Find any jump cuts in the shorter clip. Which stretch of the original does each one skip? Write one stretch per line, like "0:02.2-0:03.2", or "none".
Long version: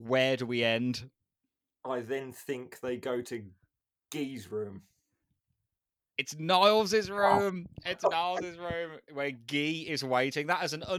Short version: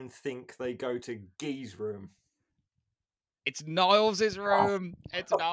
0:03.6-0:04.0